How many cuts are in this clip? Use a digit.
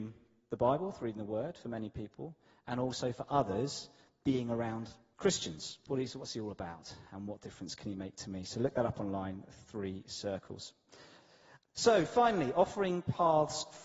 1